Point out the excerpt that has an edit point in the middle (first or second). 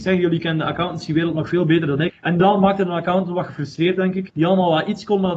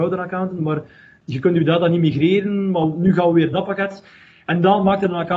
first